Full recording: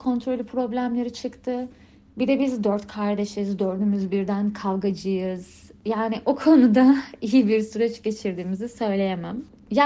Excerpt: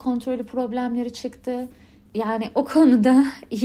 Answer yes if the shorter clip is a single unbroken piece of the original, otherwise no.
no